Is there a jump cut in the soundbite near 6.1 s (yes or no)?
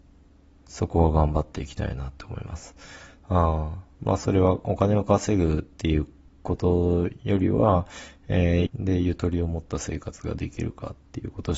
no